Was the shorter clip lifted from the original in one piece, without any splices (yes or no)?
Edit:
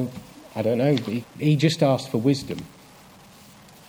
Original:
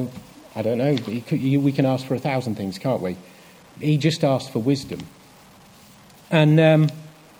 no